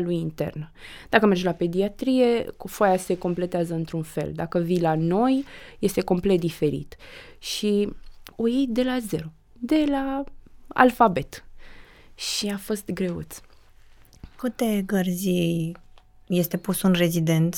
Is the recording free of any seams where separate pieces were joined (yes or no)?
no